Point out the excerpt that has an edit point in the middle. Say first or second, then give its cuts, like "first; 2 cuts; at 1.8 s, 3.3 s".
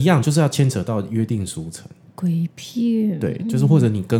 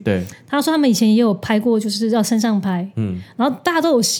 first; 1 cut; at 2.0 s